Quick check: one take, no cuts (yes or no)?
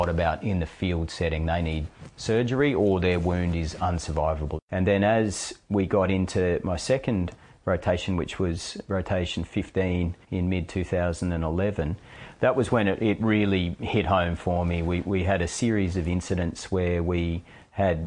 no